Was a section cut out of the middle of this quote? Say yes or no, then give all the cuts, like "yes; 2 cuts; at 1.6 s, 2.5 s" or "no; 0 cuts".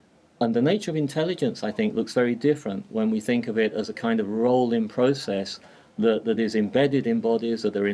no; 0 cuts